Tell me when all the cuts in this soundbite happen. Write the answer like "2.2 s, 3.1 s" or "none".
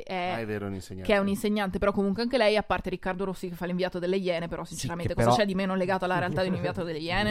none